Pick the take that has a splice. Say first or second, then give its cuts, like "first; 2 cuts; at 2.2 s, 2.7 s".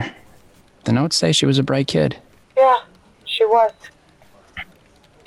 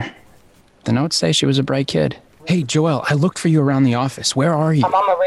second; 1 cut; at 2.4 s